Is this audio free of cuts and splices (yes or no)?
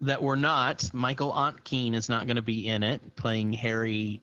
yes